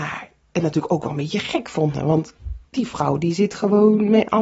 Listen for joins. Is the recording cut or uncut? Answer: uncut